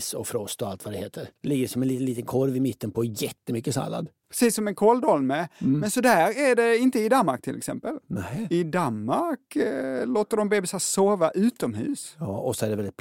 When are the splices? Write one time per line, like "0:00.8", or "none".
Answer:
none